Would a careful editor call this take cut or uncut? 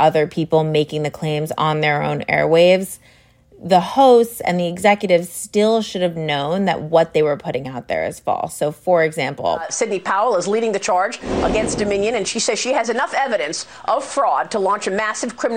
uncut